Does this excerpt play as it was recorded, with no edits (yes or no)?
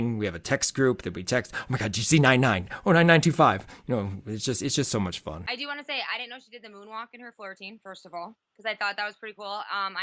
no